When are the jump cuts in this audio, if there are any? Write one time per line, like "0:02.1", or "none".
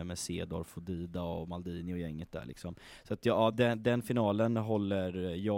none